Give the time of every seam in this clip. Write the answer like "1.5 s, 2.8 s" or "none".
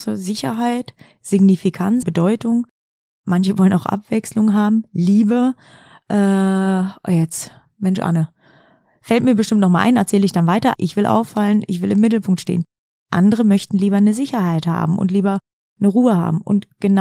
2.0 s, 10.7 s